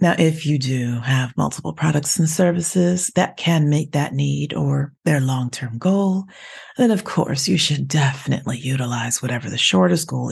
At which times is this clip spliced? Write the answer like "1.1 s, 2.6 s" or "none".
5.0 s